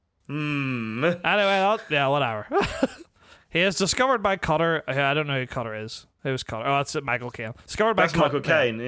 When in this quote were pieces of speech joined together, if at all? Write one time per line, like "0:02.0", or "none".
none